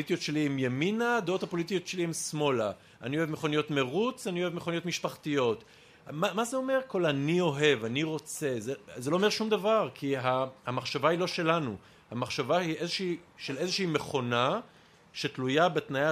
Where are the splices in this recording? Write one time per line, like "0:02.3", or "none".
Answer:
none